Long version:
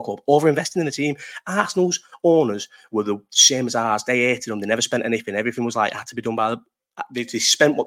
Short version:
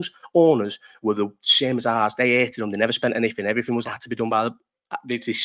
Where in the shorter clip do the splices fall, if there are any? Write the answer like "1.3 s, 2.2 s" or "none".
3.9 s